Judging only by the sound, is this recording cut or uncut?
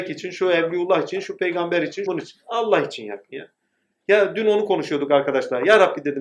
cut